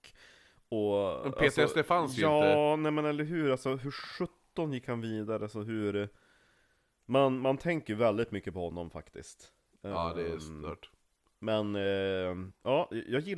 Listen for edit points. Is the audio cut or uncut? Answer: uncut